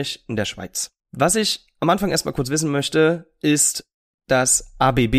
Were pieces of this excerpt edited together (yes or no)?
yes